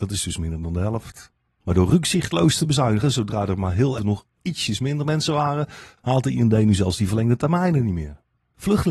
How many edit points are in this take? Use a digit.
1